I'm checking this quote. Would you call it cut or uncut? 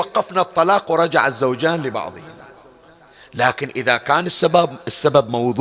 uncut